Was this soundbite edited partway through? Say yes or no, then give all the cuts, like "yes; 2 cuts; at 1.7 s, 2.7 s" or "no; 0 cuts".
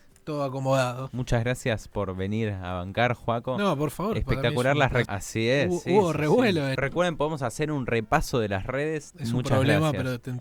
yes; 3 cuts; at 5.1 s, 6.8 s, 9.1 s